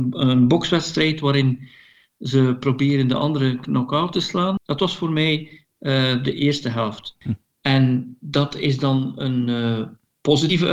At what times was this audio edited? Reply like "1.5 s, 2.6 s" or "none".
4.6 s, 7.2 s